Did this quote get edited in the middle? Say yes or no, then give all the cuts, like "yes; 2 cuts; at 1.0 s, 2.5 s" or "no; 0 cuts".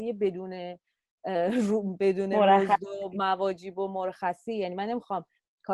no; 0 cuts